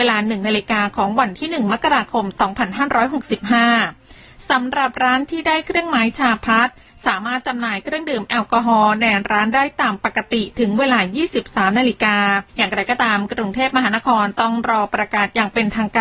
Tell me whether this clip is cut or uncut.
cut